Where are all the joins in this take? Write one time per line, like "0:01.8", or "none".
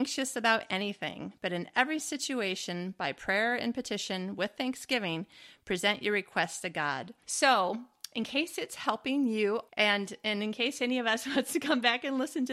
0:07.2
0:09.7